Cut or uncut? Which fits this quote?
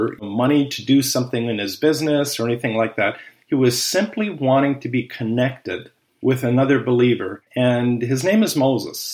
cut